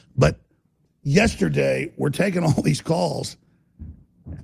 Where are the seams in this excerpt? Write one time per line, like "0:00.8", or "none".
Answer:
none